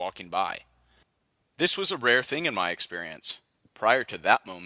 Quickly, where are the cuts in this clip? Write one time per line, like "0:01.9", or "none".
none

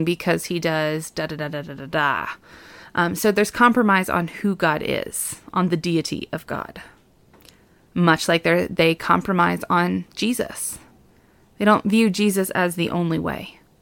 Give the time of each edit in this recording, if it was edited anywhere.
none

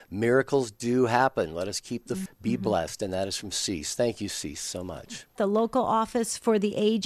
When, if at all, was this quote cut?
0:02.3
0:05.4

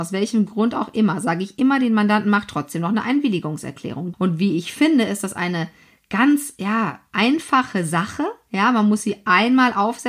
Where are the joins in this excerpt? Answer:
0:04.1

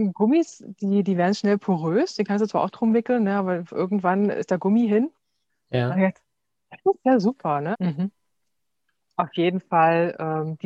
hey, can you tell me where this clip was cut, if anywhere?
0:05.5
0:07.7

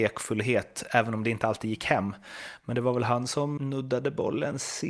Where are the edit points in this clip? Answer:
0:03.6

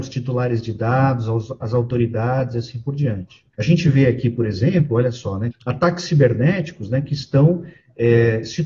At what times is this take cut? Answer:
0:03.5
0:05.5

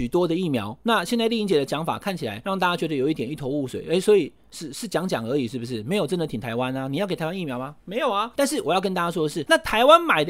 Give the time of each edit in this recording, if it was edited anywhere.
none

